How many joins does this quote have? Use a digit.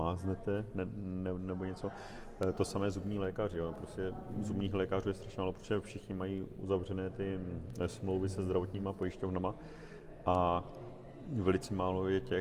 0